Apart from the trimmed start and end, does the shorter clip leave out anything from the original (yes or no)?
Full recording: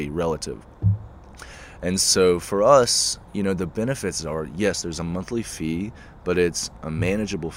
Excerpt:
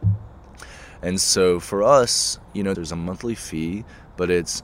yes